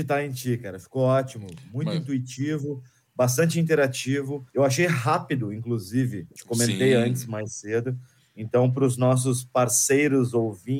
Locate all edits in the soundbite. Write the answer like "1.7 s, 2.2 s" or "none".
4.5 s

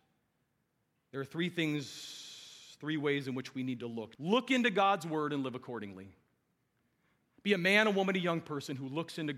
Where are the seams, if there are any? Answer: 4.2 s

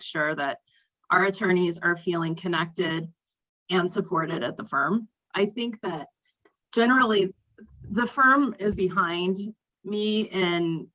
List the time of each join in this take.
5.3 s, 8.7 s

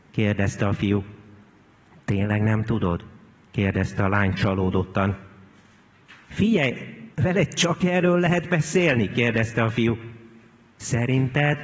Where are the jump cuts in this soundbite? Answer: 7.1 s

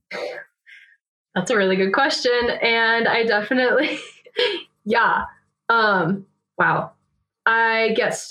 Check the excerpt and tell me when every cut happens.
none

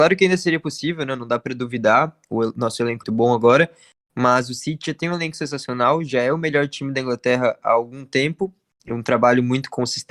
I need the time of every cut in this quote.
3.0 s

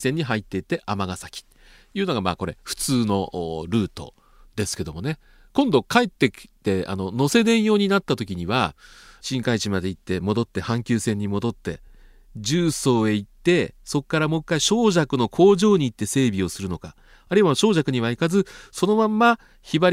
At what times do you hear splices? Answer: none

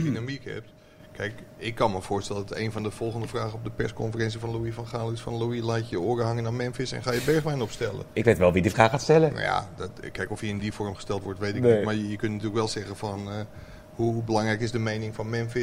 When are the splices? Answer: none

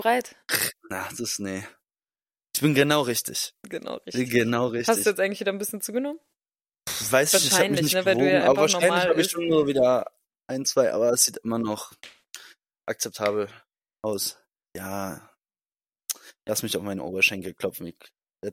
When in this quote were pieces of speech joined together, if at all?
none

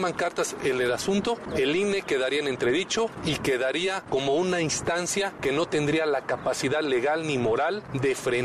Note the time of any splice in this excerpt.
none

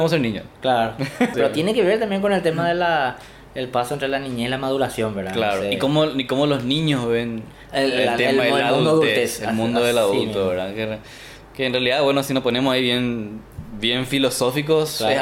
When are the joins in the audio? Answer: 1.3 s

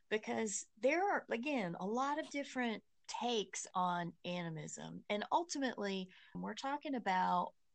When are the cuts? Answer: 6.3 s

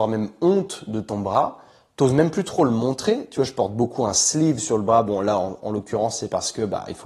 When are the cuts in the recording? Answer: none

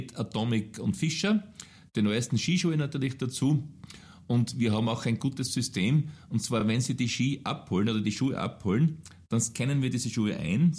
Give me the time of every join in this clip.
none

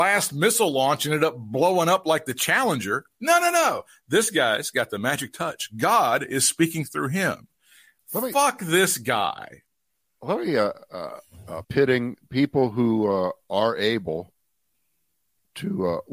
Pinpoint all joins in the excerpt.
11.6 s

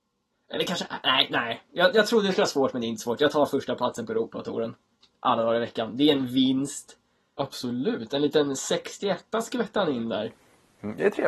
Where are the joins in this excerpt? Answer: 7.4 s

